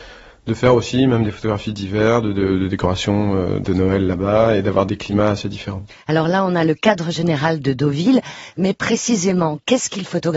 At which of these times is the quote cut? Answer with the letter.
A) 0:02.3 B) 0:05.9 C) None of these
C